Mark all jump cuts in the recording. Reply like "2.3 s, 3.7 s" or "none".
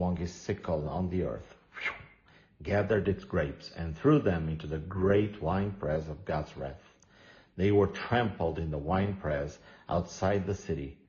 none